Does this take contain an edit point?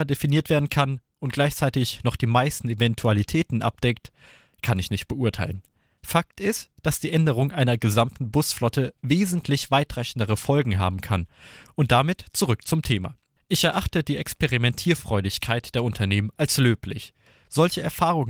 no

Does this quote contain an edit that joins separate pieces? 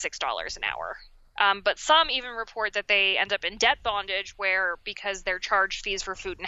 no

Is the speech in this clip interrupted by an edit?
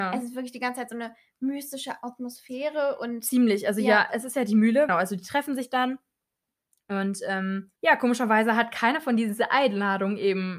yes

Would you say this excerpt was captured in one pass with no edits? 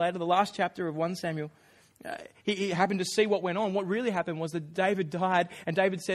yes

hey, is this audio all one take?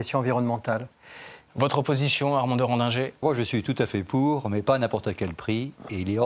no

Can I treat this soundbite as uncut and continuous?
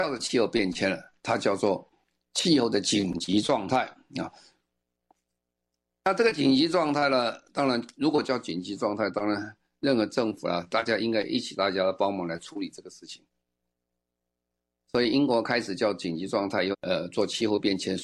no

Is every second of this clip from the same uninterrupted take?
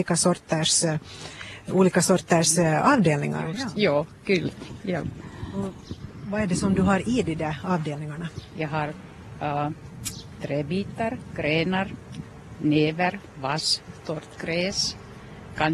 yes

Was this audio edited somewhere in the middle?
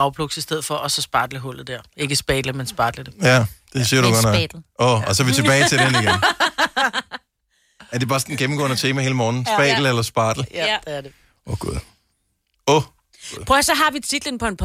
no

